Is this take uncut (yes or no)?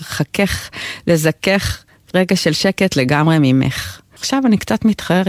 no